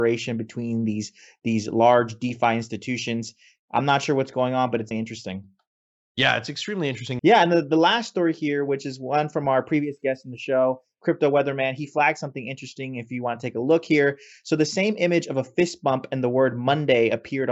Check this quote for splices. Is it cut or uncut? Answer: cut